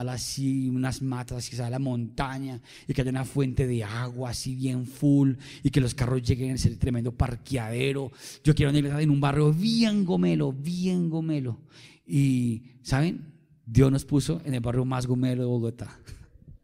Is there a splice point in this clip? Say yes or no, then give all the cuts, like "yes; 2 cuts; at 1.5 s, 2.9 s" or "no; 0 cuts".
no; 0 cuts